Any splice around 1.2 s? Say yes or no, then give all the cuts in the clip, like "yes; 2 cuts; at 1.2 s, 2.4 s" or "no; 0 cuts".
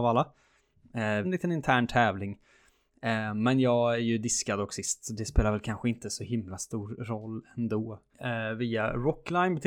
yes; 2 cuts; at 1.2 s, 8.1 s